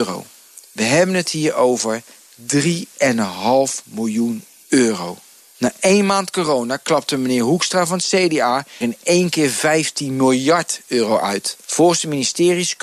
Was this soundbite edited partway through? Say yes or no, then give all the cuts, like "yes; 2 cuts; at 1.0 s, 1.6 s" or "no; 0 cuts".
yes; 3 cuts; at 5.5 s, 8.8 s, 11.6 s